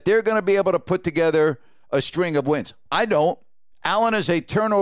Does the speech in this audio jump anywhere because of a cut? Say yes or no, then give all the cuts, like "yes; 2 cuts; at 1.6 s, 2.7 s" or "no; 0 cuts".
yes; 1 cut; at 3.7 s